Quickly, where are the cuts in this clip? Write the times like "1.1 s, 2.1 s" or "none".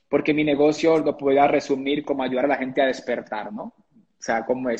none